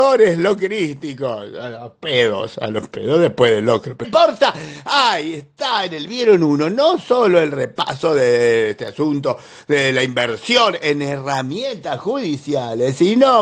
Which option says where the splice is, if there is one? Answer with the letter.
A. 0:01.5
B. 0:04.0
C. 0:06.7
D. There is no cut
B